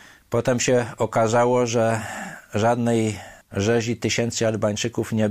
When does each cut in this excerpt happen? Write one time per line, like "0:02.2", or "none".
0:03.4